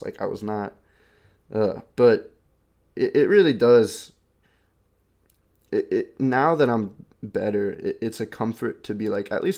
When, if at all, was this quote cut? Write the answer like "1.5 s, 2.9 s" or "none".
none